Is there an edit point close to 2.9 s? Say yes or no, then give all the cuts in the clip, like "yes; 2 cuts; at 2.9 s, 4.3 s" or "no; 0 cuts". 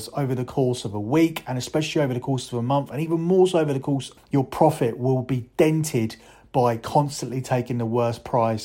no; 1 cut; at 4.2 s